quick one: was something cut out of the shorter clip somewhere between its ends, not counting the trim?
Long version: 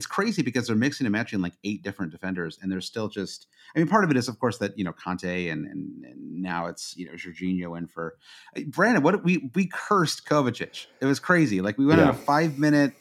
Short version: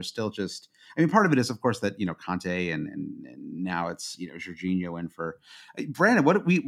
no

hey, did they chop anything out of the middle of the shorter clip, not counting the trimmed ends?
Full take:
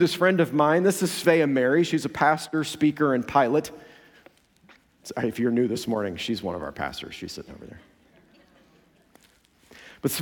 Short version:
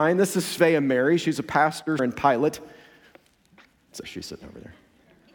yes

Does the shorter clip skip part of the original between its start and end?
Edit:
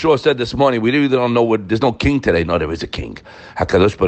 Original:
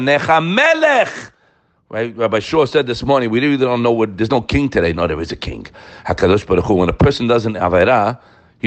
no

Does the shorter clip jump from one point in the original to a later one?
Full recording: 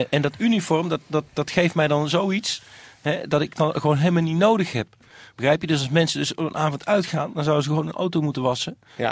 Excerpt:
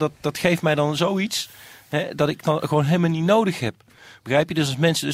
no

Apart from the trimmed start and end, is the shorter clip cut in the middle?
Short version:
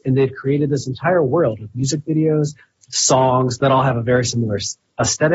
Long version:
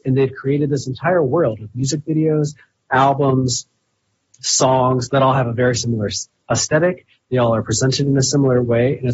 yes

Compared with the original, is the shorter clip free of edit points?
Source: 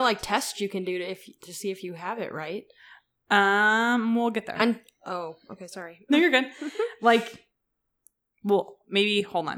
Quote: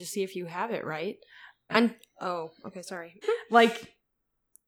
no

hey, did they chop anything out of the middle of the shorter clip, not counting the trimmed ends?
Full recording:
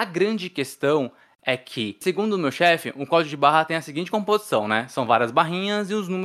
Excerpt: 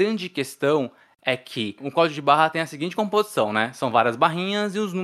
yes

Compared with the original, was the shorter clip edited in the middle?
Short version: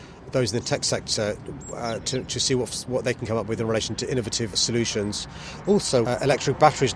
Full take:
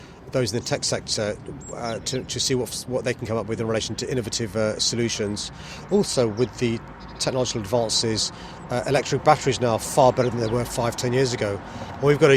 yes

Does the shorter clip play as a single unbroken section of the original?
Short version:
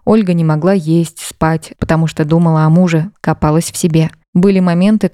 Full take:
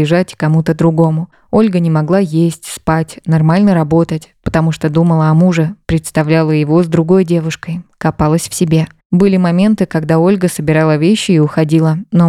no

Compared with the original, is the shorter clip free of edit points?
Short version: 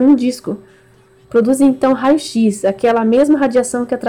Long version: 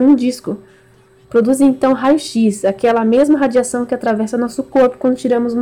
yes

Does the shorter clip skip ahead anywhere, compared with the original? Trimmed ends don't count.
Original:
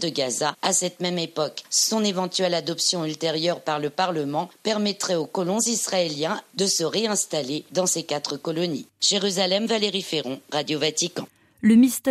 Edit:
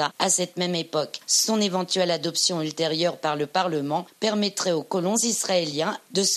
no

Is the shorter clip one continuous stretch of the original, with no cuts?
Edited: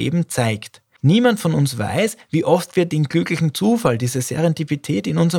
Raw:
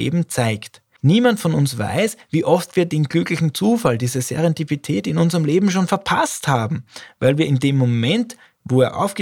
yes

